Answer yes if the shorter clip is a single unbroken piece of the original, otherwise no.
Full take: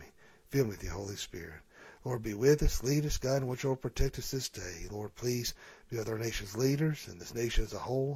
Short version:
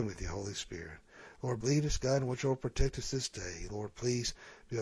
no